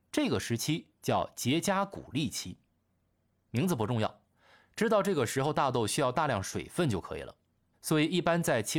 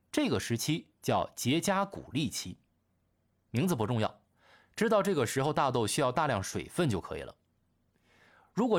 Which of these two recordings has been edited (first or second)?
first